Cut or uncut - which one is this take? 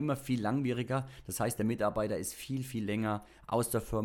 uncut